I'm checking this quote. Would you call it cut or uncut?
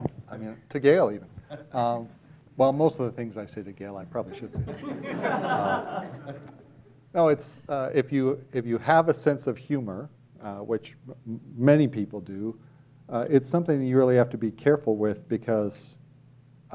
uncut